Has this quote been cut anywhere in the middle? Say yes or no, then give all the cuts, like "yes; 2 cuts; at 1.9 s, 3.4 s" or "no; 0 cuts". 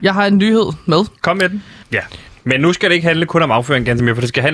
yes; 1 cut; at 1.8 s